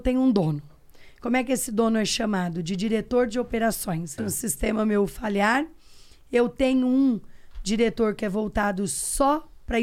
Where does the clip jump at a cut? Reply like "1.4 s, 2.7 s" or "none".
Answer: 4.2 s